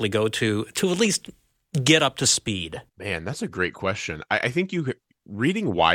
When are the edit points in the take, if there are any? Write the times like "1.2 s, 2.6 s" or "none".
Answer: 2.9 s